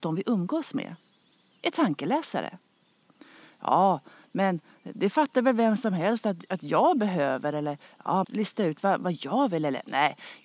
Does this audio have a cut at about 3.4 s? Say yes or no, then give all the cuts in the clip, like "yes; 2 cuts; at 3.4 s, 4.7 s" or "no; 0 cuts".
no; 1 cut; at 8.2 s